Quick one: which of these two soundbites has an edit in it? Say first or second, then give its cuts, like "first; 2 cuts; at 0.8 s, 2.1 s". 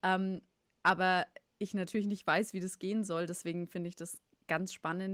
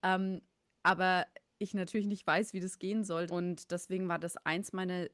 second; 1 cut; at 3.3 s